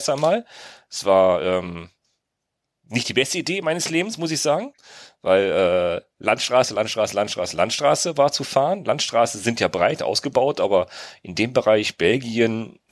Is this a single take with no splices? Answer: yes; 0 cuts

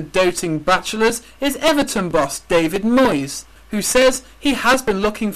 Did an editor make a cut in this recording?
yes; 1 cut; at 3.6 s

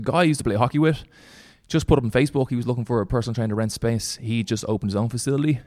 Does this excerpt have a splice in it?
no; 0 cuts

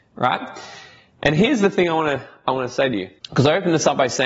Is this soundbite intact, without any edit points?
no; 1 cut; at 3.2 s

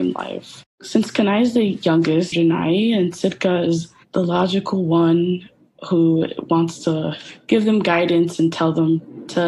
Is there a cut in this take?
yes; 1 cut; at 2.3 s

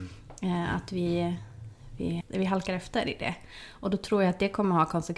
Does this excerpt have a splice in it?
yes; 1 cut; at 2.2 s

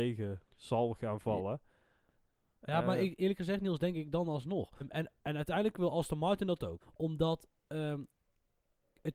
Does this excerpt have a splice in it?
yes; 2 cuts; at 4.8 s, 6.8 s

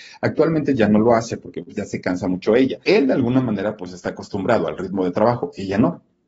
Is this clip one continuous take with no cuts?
no; 1 cut; at 2.8 s

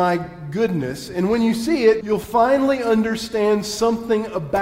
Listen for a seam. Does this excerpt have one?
yes; 1 cut; at 2.0 s

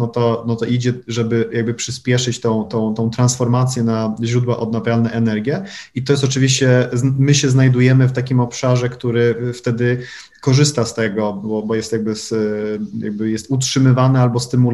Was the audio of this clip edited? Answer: no; 0 cuts

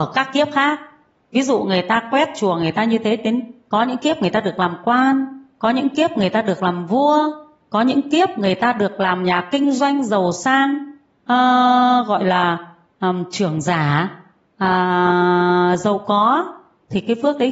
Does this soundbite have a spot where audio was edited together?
no; 0 cuts

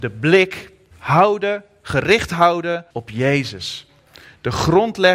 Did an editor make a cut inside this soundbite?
yes; 2 cuts; at 0.9 s, 2.9 s

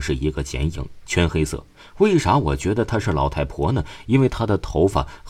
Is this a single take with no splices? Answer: yes; 0 cuts

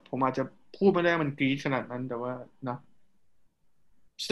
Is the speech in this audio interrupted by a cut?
no; 0 cuts

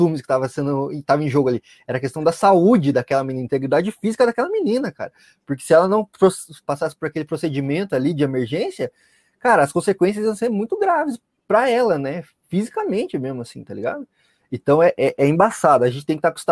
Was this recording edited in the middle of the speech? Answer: no; 0 cuts

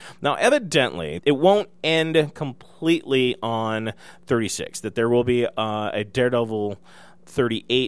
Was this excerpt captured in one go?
no; 1 cut; at 1.2 s

